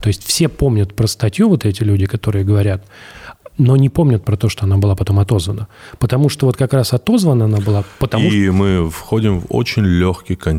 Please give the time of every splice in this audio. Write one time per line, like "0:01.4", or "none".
none